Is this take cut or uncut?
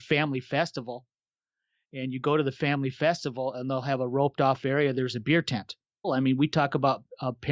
cut